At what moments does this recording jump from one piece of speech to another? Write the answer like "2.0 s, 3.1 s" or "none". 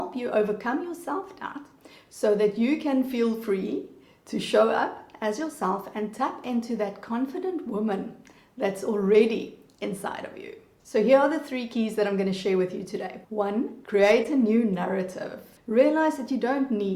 15.6 s

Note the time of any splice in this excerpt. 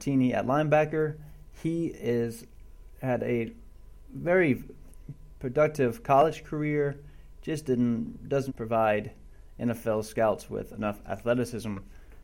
8.5 s

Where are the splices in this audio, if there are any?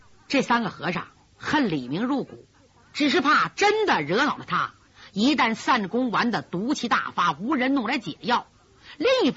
none

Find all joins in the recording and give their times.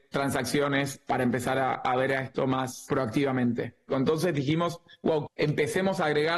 3.9 s, 5.3 s

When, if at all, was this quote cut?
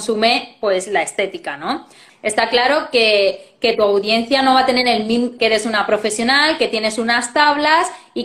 2.1 s, 5.4 s

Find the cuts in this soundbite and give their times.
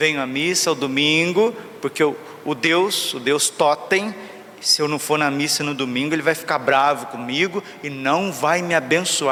none

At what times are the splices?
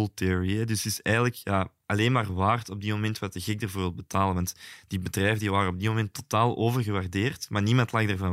none

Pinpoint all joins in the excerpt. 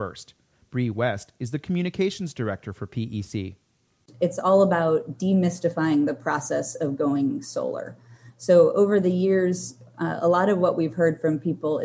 none

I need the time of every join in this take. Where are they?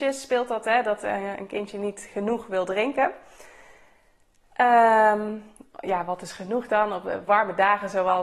none

